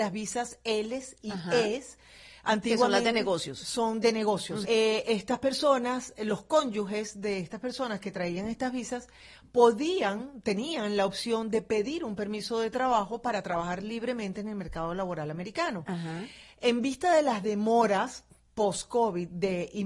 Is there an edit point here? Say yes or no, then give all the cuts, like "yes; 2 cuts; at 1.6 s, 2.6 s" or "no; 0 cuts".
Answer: yes; 1 cut; at 4.6 s